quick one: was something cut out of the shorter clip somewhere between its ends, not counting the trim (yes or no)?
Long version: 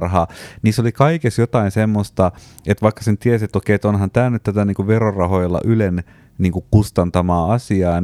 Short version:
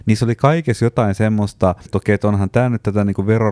yes